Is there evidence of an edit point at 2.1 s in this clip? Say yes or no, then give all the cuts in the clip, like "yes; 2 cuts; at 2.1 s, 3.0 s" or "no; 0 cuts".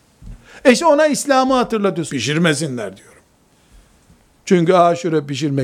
yes; 1 cut; at 2.1 s